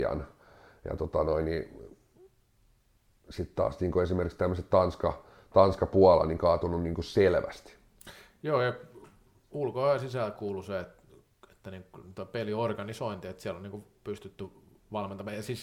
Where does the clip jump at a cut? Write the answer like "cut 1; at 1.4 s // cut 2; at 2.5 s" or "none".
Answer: none